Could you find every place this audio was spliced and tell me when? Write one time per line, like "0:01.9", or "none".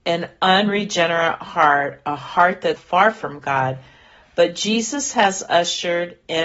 0:02.8